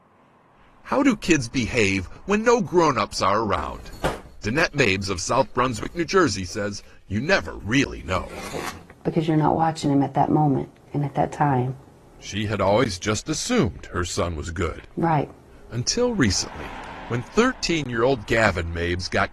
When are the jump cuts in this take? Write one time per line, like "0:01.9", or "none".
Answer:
none